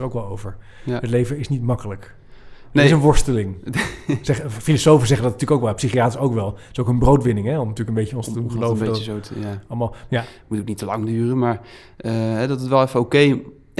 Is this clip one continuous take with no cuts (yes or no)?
no